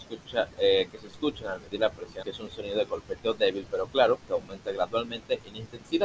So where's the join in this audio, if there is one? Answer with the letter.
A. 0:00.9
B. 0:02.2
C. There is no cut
B